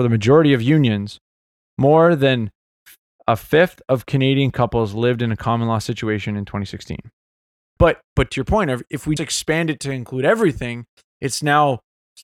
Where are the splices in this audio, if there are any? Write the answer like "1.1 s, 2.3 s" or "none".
7.8 s, 9.2 s